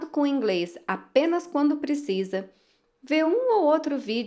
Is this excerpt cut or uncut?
uncut